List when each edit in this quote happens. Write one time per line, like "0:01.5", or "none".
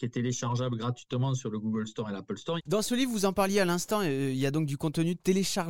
0:02.6